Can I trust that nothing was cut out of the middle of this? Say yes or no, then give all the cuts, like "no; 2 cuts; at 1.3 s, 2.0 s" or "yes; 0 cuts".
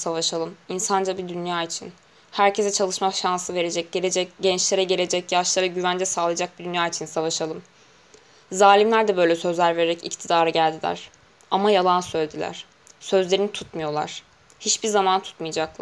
yes; 0 cuts